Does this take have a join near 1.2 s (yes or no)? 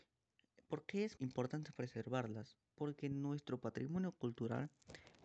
yes